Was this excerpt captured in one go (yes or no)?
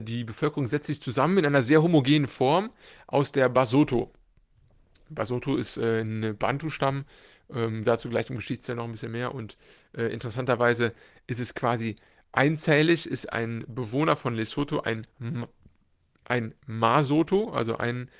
yes